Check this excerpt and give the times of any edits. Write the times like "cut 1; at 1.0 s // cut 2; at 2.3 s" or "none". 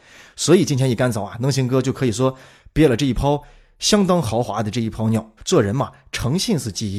cut 1; at 5.4 s